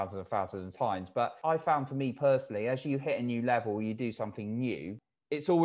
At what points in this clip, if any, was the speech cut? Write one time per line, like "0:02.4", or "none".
none